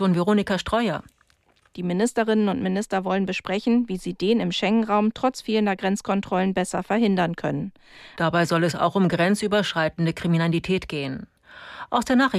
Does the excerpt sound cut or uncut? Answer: cut